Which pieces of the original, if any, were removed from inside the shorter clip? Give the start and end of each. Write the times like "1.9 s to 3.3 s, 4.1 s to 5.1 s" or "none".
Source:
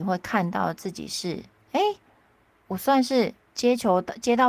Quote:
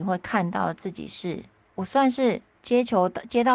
1.6 s to 2.5 s